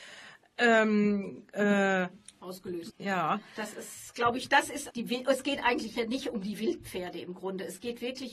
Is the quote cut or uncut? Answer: cut